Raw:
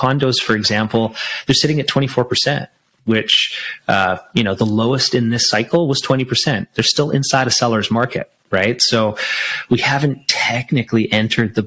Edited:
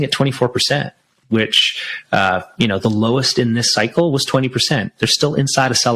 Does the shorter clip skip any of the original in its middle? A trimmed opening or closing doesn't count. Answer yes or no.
no